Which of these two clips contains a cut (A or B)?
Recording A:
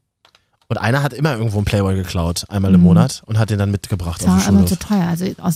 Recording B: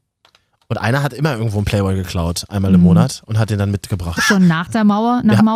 B